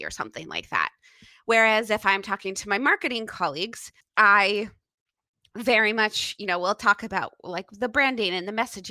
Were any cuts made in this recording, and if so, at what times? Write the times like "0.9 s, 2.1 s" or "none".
none